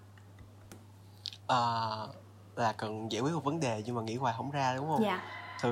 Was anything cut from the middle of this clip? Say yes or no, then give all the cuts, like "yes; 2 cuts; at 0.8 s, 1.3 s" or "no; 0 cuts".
yes; 1 cut; at 1.4 s